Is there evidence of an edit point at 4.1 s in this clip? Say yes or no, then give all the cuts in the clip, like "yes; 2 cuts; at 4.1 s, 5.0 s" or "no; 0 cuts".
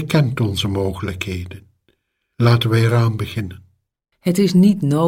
yes; 1 cut; at 4.1 s